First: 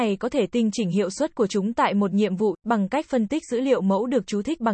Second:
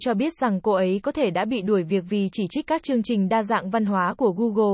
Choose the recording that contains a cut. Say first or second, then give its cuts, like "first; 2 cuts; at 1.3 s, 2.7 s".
first; 1 cut; at 2.6 s